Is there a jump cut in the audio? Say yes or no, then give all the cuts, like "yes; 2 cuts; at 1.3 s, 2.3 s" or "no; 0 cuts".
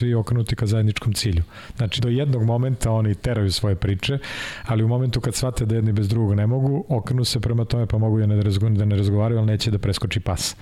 yes; 1 cut; at 2.0 s